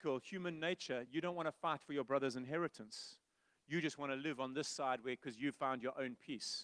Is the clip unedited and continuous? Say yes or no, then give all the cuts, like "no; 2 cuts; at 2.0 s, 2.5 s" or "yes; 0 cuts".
yes; 0 cuts